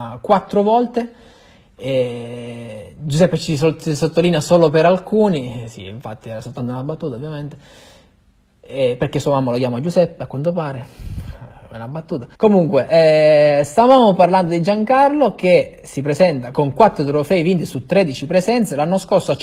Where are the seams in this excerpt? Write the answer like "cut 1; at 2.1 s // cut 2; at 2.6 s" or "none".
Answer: cut 1; at 12.3 s // cut 2; at 16.5 s